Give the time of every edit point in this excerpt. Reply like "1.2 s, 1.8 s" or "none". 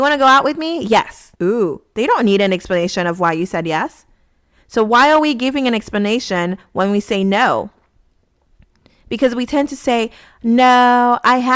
1.3 s

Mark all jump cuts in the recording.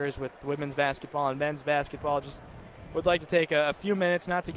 none

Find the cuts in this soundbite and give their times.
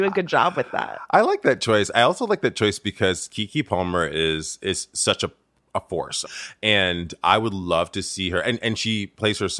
6.2 s

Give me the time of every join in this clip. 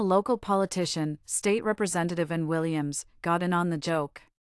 none

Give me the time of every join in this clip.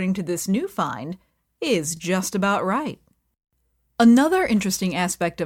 none

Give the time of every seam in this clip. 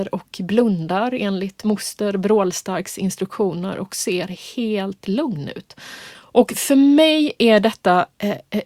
6.1 s

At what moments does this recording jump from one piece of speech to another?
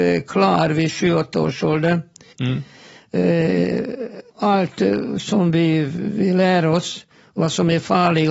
2.3 s, 4.3 s

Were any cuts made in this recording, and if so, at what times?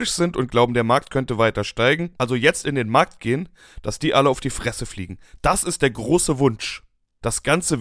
none

